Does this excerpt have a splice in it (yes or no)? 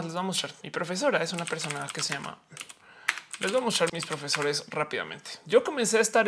yes